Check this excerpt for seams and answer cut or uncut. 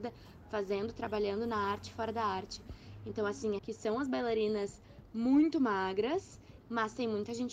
cut